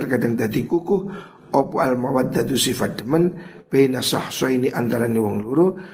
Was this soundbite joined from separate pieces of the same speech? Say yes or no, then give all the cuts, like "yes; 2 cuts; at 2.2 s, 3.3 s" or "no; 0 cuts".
no; 0 cuts